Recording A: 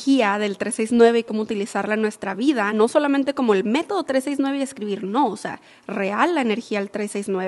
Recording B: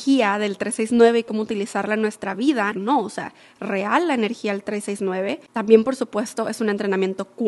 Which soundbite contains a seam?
B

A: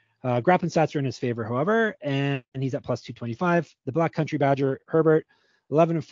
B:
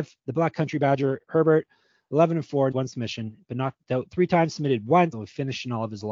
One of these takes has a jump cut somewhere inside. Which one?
B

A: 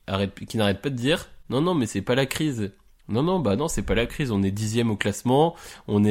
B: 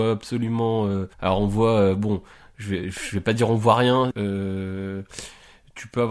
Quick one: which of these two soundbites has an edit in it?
B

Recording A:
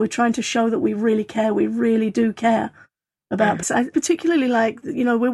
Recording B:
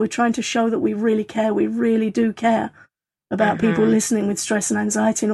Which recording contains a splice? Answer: A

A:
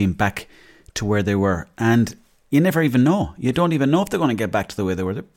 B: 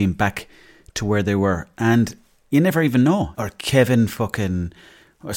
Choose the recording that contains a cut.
B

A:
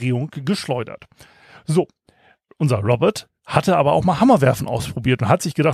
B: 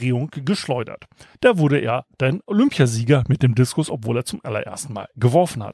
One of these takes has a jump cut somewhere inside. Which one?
B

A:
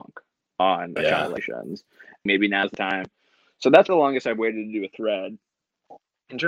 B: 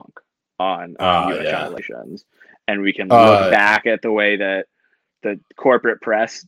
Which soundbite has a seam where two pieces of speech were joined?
A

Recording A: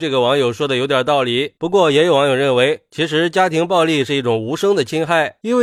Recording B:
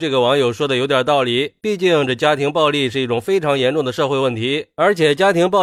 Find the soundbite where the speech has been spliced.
A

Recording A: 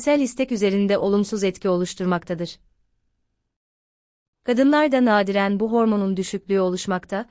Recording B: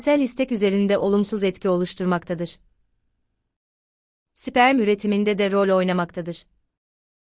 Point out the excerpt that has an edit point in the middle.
A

